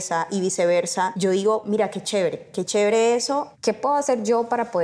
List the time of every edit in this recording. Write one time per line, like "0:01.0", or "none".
0:03.5